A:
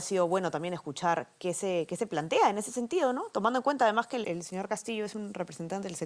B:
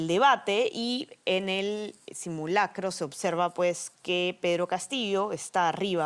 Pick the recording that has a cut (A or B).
A